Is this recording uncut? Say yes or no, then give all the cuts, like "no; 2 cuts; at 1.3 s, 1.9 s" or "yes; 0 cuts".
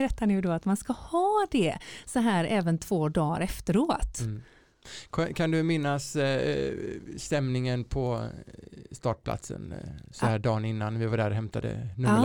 yes; 0 cuts